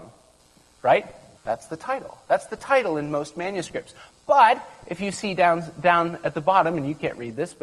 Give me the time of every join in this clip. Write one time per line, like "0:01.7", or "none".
0:01.4